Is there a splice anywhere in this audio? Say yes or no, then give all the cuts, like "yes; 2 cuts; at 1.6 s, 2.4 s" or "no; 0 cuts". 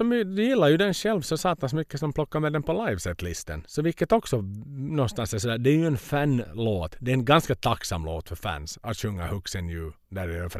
no; 0 cuts